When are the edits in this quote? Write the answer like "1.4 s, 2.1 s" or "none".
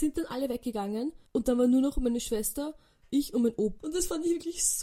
1.3 s, 3.8 s